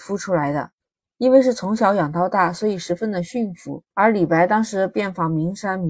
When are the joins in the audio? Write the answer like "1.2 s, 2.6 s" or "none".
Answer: 3.9 s